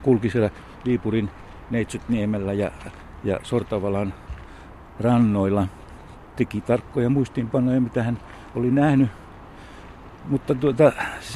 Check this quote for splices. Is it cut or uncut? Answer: uncut